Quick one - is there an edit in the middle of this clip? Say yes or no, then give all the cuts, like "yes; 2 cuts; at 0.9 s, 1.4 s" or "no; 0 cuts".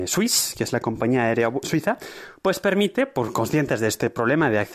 yes; 1 cut; at 1.6 s